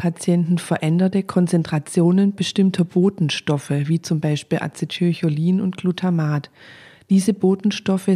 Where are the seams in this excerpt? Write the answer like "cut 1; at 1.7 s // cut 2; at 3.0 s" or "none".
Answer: none